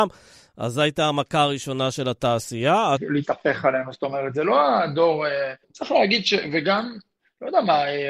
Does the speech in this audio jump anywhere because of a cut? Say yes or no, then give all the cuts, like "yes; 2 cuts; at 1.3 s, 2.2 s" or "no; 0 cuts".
yes; 2 cuts; at 3.0 s, 5.6 s